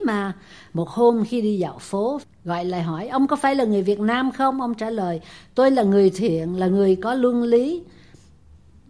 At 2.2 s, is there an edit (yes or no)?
yes